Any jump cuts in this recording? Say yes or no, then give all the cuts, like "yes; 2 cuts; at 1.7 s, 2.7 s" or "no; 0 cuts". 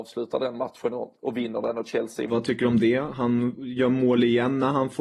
yes; 1 cut; at 2.3 s